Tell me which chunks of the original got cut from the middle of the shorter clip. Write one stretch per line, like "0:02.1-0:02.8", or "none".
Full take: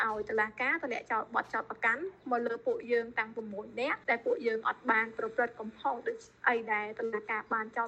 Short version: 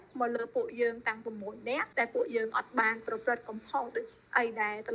none